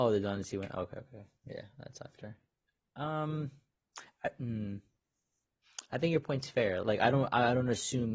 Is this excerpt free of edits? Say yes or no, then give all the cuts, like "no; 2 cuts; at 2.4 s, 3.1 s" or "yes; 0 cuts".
no; 1 cut; at 6.8 s